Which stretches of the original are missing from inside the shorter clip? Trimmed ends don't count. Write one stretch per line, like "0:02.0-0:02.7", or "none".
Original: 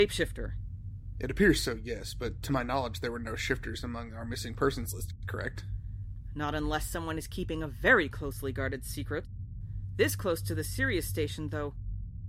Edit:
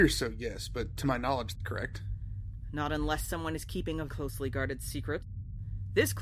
0:03.0-0:05.2
0:07.7-0:08.1